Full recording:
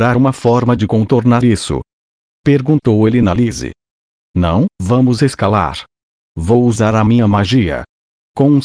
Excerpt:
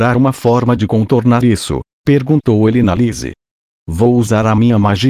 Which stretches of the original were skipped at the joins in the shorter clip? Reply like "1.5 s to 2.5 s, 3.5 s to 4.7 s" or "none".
1.9 s to 2.3 s, 4.2 s to 6.3 s